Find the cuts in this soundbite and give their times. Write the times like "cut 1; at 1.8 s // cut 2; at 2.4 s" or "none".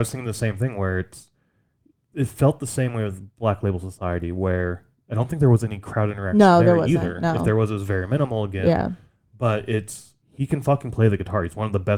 cut 1; at 10.2 s